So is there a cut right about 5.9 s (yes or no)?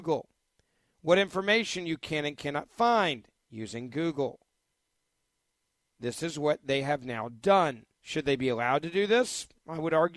no